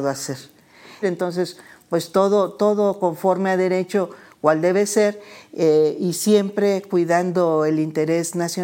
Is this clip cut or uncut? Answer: cut